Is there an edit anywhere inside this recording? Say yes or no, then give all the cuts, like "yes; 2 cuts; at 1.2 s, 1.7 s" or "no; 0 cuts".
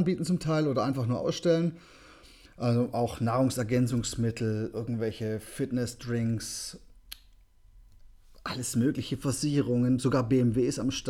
no; 0 cuts